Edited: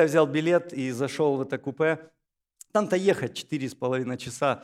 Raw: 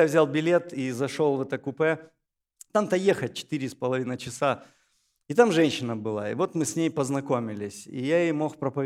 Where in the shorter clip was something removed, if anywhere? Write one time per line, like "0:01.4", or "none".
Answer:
none